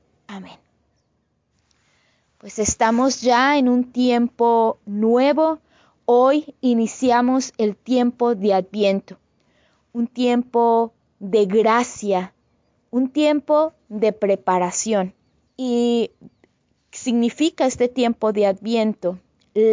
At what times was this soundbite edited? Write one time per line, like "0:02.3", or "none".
0:15.5